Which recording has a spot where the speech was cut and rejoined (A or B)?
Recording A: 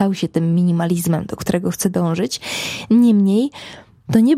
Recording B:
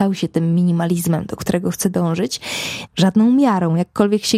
B